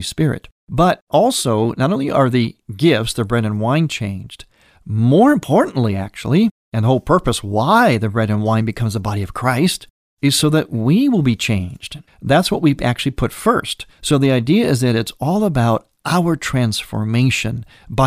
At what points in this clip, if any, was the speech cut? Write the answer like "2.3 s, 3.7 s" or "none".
12.1 s, 13.9 s